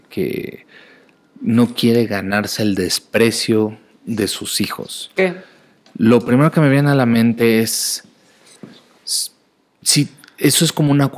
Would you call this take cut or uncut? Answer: uncut